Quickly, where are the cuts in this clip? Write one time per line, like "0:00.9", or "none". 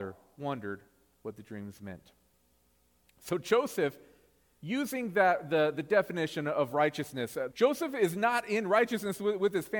0:07.5